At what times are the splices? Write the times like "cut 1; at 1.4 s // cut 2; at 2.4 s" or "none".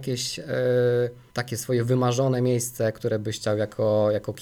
cut 1; at 1.3 s